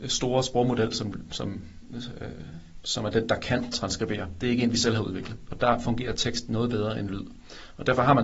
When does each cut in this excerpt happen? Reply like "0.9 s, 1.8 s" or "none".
3.3 s, 5.5 s